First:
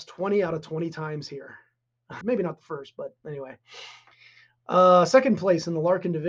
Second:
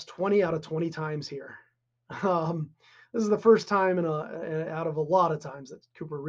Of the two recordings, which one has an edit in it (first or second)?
first